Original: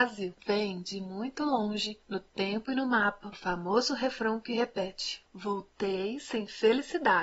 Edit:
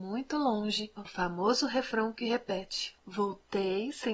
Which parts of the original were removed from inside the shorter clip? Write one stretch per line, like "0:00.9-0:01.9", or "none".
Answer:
0:02.0-0:03.2